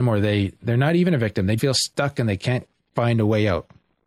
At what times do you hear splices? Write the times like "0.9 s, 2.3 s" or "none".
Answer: 1.6 s